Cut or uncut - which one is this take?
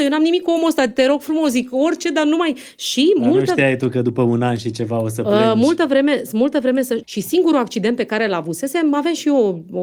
cut